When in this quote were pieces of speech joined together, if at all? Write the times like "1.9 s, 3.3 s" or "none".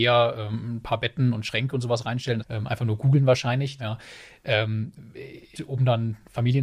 2.4 s, 3.8 s, 5.5 s